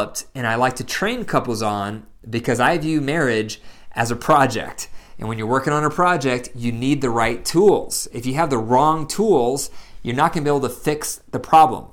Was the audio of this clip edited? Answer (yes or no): no